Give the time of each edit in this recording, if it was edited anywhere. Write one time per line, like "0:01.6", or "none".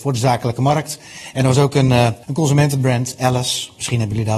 0:02.2

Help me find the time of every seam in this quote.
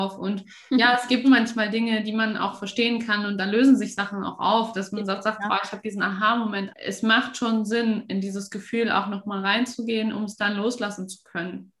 0:01.2
0:06.7

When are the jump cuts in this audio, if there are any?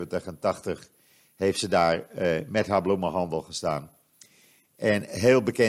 none

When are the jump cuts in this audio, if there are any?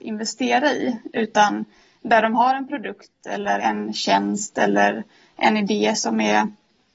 0:03.6

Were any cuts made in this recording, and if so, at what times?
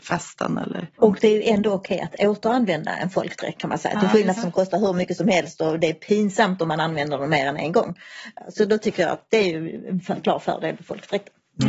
0:00.9
0:04.4

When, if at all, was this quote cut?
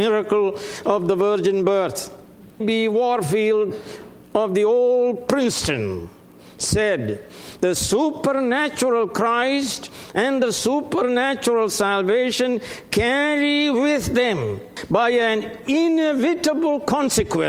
0:02.6

